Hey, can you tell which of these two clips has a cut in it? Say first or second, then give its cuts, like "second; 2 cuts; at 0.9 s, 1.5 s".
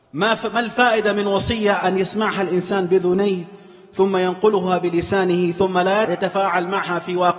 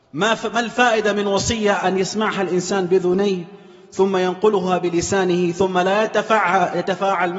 first; 1 cut; at 6.0 s